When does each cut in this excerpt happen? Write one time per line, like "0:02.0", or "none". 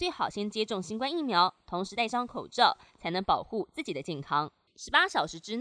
0:04.7